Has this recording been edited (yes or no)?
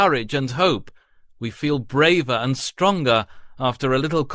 no